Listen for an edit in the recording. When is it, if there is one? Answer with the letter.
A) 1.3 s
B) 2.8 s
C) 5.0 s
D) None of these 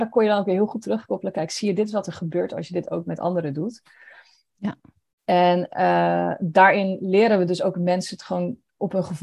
D